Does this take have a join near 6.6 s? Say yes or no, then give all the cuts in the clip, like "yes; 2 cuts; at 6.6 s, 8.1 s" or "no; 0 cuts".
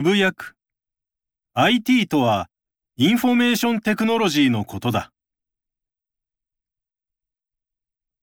no; 1 cut; at 1.5 s